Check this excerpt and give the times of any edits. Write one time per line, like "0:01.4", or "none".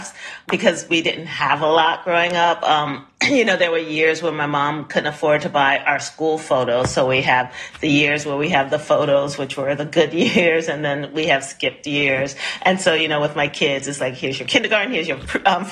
none

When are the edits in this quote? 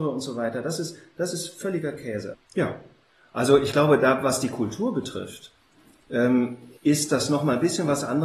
0:02.3
0:06.8

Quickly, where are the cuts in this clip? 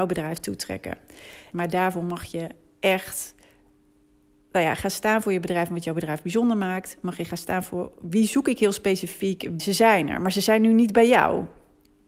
0:01.5
0:09.6

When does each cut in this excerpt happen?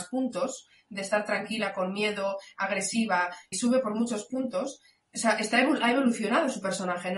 0:03.5
0:05.0

